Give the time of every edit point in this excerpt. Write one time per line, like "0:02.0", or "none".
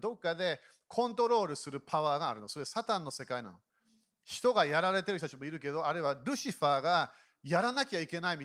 none